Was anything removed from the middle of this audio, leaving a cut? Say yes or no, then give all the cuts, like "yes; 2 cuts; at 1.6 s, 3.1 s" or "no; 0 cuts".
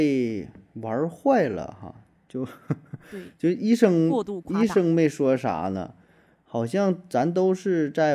no; 0 cuts